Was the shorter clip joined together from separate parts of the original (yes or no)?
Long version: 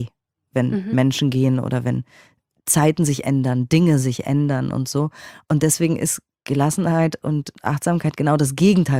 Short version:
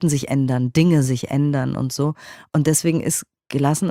no